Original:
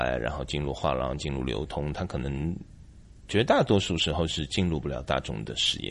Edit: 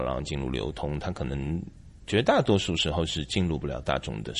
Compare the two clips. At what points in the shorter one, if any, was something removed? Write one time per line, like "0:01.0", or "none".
0:02.0